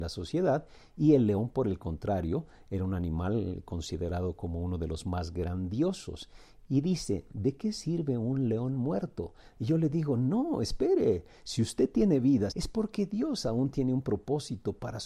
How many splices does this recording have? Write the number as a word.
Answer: two